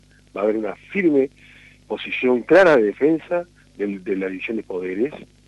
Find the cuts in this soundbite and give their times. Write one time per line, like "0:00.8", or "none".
0:03.6